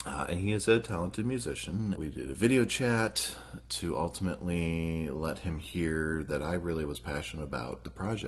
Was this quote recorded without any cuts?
no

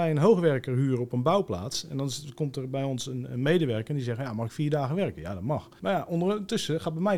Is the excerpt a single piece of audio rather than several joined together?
yes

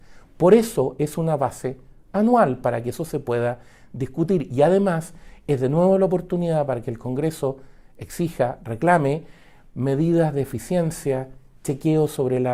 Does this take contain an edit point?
no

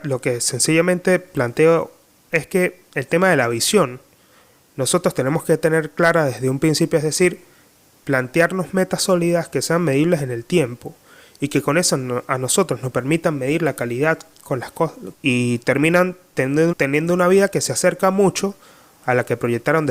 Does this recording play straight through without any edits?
no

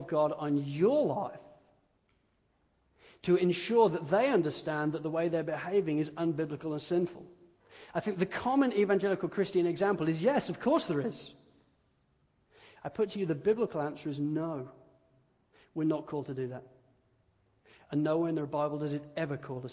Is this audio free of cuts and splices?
yes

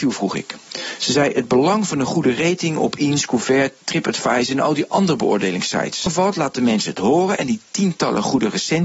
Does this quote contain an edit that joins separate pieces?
no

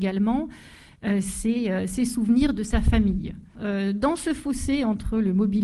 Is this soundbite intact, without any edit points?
no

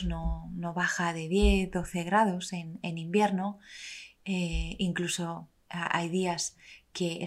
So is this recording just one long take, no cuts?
yes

